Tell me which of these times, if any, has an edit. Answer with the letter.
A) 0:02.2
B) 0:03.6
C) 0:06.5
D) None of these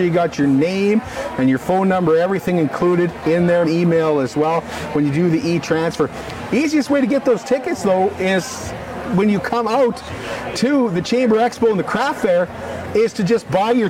B